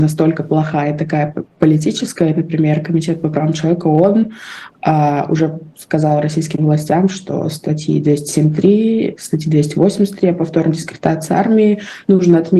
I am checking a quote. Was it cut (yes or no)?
no